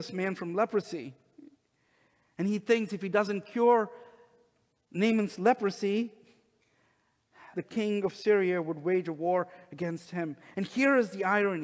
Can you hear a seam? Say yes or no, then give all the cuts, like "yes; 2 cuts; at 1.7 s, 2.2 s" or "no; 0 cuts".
yes; 1 cut; at 7.5 s